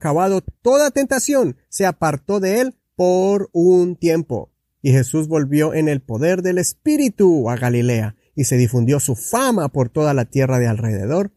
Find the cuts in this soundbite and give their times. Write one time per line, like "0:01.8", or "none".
none

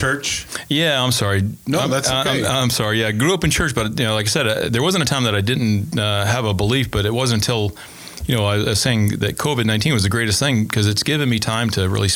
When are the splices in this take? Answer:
none

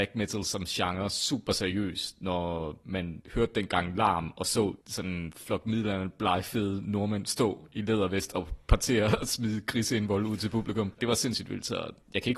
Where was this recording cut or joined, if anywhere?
0:11.0

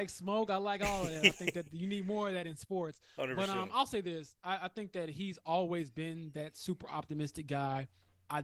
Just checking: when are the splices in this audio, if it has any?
none

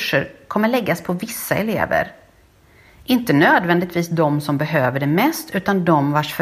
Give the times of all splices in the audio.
none

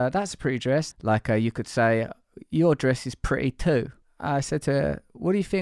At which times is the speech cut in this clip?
0:00.9
0:04.0

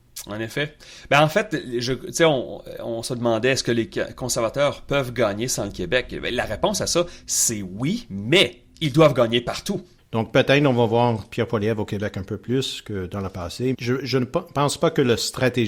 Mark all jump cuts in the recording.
0:10.0
0:13.7

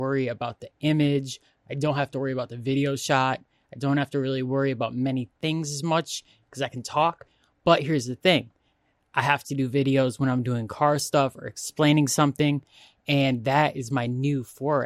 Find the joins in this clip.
none

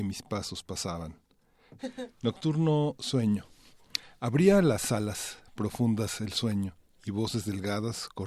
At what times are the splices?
0:01.8

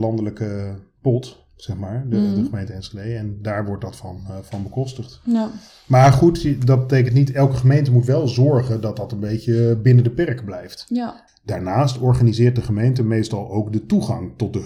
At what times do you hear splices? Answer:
0:11.3

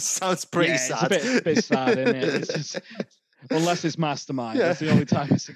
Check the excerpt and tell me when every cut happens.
none

